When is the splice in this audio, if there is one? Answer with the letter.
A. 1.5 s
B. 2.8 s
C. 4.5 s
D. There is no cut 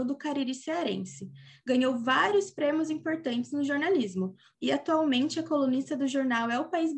C